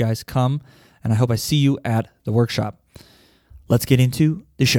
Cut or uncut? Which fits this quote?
uncut